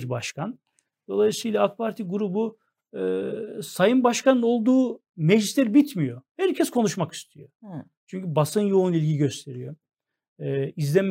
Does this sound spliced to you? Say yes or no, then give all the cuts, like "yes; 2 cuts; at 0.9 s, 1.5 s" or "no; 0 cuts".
no; 0 cuts